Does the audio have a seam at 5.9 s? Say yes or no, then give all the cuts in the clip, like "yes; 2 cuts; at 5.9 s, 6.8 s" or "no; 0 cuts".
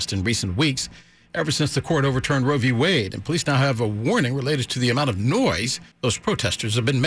yes; 1 cut; at 5.9 s